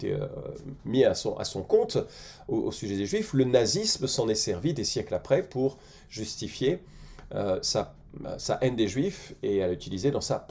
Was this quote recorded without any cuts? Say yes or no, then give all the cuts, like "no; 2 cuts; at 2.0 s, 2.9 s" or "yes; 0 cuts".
yes; 0 cuts